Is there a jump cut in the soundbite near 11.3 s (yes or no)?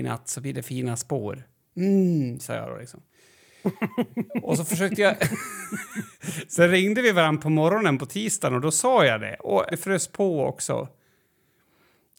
no